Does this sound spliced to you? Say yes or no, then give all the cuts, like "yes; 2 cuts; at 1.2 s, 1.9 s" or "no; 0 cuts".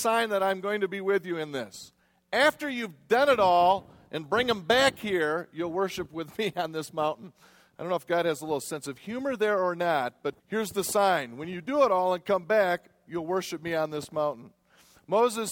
yes; 1 cut; at 10.4 s